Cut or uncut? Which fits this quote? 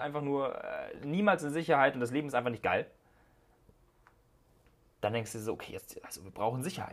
uncut